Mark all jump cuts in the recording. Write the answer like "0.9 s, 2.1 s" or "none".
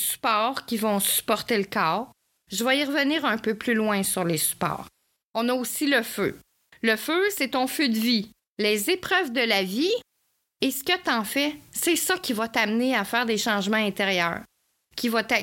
8.4 s

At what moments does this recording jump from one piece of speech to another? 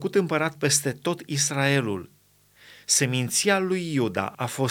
none

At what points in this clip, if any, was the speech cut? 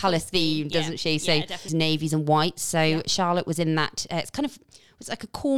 1.7 s

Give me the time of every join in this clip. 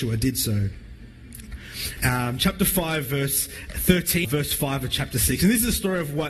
2.0 s, 4.2 s

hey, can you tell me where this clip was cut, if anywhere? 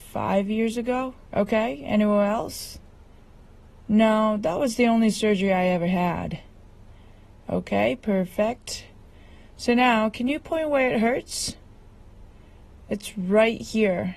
1.2 s

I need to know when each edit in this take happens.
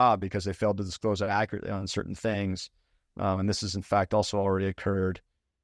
none

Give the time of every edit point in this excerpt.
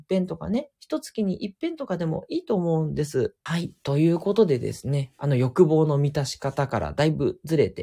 3.5 s

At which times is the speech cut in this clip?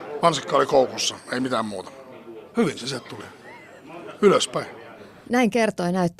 2.5 s

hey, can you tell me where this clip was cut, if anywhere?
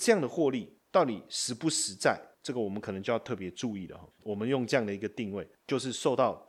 4.2 s, 5.6 s

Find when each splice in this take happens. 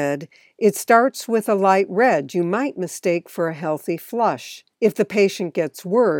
4.7 s

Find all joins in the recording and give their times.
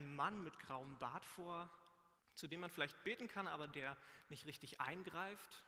2.2 s

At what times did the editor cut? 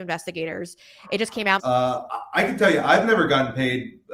1.6 s

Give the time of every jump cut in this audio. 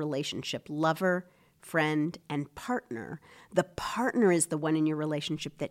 none

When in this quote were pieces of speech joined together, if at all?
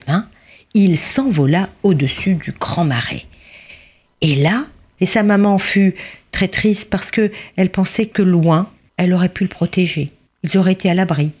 5.0 s

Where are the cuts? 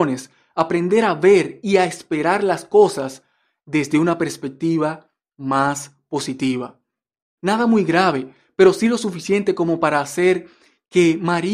7.4 s

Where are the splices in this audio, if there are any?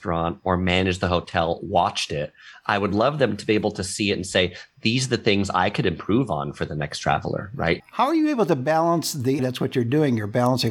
7.8 s, 9.4 s

